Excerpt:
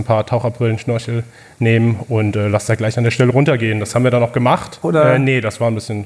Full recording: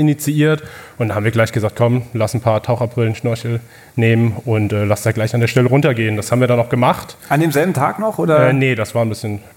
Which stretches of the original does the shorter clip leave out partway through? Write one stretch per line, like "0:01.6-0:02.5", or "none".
0:07.2-0:08.2